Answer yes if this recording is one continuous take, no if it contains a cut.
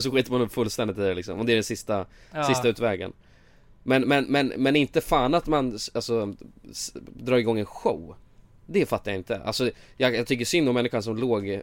yes